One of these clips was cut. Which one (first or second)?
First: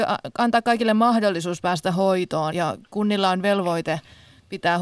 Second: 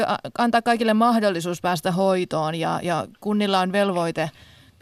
first